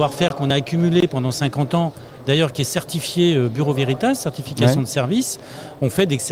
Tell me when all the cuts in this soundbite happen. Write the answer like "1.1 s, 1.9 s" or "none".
none